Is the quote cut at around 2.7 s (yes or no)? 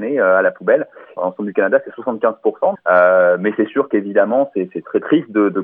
yes